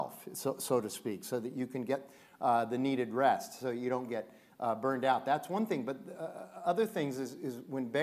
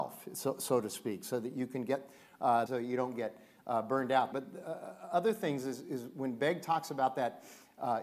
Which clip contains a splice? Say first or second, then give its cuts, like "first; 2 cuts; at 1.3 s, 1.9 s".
second; 2 cuts; at 2.7 s, 4.3 s